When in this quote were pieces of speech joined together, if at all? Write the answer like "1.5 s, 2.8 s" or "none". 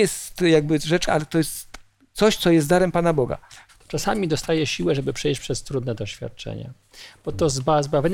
1.1 s, 3.7 s